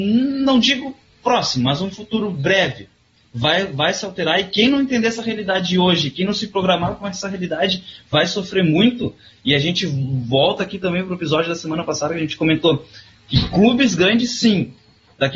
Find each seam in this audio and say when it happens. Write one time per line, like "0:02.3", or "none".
none